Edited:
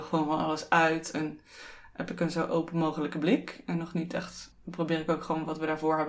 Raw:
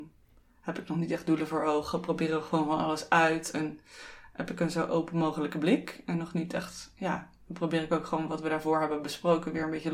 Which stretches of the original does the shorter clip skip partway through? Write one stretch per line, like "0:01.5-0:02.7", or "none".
0:06.9-0:07.3